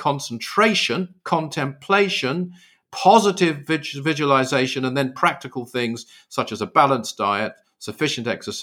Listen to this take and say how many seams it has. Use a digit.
1